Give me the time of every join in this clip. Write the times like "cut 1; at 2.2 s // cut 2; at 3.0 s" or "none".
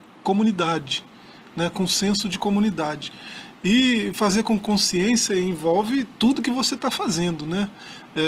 none